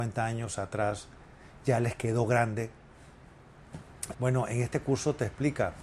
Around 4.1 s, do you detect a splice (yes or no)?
yes